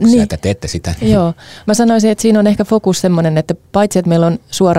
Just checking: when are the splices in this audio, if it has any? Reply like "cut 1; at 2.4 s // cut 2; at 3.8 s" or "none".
none

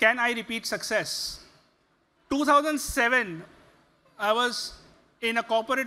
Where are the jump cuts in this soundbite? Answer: cut 1; at 2.2 s

